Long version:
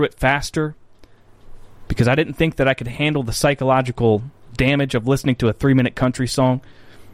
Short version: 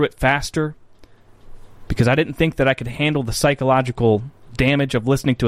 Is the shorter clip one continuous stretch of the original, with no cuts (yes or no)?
yes